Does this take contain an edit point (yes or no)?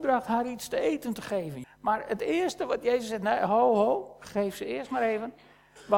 yes